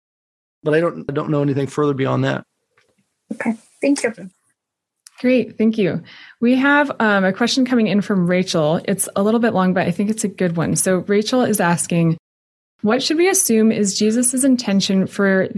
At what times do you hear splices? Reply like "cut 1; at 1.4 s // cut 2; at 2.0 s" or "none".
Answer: none